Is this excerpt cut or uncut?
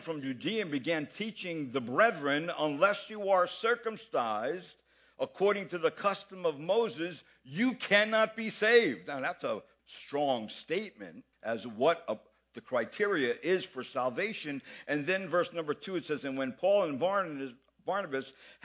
cut